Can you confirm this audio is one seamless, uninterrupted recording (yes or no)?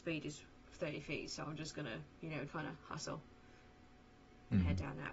no